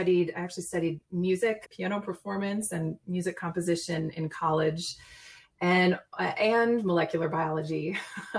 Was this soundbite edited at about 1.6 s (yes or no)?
yes